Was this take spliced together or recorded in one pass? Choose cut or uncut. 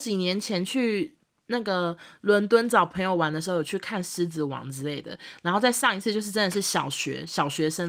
uncut